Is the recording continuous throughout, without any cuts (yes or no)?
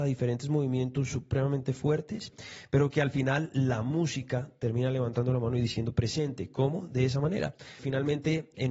no